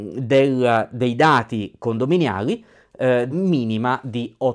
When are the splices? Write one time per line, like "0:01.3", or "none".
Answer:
0:03.3